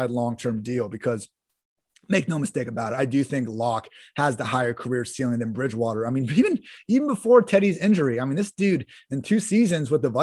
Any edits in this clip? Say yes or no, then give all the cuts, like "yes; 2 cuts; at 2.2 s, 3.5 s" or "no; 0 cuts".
no; 0 cuts